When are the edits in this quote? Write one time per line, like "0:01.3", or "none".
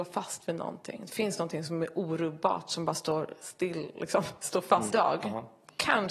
0:04.9